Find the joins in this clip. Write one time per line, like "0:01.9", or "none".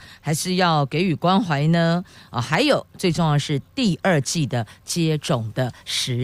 none